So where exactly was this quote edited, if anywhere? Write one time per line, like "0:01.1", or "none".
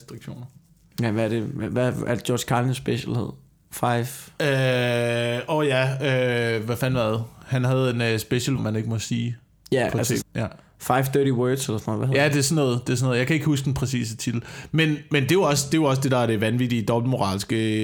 0:08.6
0:10.2